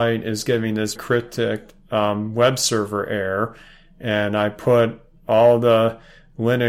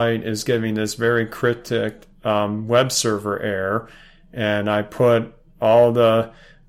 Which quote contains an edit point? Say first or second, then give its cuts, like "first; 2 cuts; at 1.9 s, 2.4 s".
first; 1 cut; at 1.0 s